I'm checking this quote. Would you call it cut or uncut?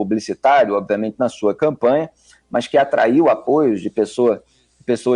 uncut